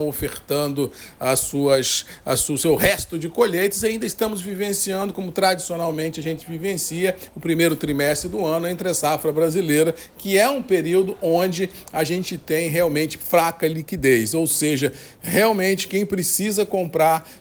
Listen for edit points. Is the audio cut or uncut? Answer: uncut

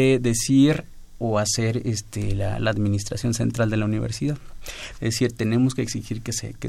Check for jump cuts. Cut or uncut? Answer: cut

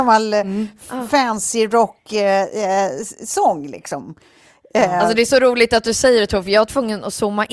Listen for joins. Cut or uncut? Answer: uncut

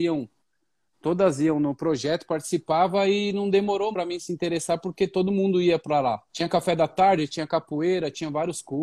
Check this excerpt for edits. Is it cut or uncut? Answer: cut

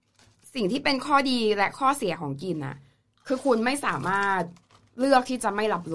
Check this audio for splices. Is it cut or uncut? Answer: uncut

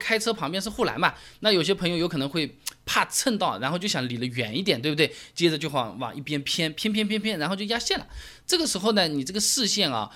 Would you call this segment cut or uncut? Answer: uncut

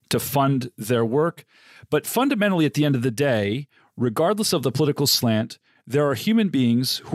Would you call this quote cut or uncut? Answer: uncut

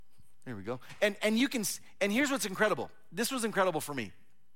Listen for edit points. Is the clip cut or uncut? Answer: uncut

